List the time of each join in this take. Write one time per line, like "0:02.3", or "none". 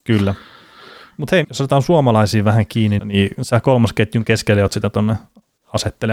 0:01.4
0:03.0